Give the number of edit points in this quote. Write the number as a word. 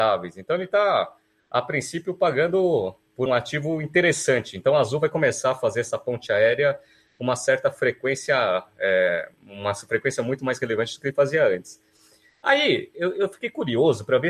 one